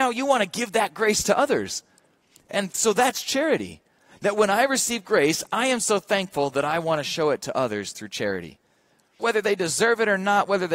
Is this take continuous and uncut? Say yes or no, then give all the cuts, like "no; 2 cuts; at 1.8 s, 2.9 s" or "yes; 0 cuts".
no; 1 cut; at 9.2 s